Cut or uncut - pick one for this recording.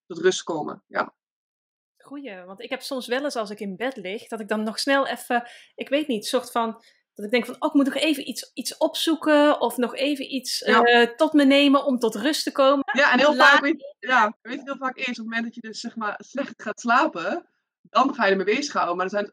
cut